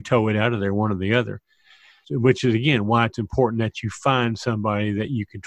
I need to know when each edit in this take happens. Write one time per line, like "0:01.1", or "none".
0:02.0